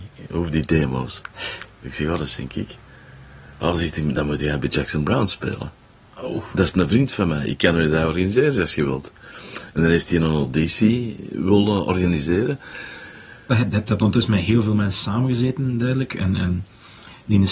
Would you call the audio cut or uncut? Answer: cut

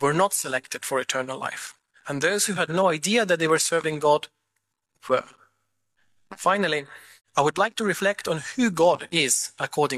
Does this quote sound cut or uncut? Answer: uncut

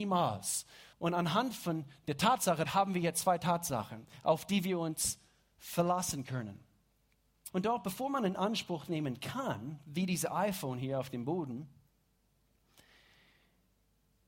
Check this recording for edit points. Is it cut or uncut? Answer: cut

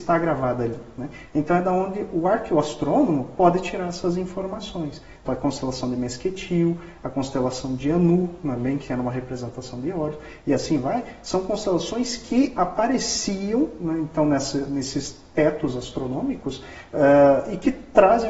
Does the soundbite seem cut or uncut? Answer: cut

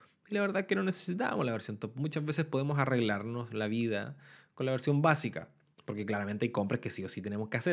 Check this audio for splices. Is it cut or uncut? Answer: uncut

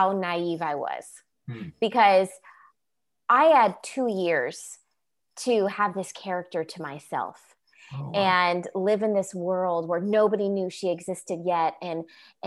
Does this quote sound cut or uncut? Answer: uncut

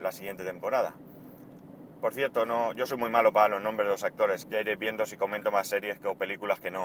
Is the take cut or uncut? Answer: cut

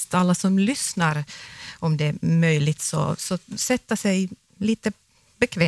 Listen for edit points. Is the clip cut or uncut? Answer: uncut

